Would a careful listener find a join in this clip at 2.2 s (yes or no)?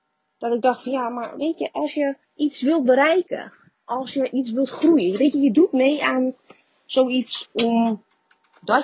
yes